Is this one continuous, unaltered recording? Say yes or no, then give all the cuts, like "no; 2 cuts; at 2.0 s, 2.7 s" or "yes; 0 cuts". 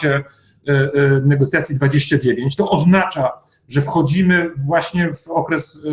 no; 1 cut; at 2.6 s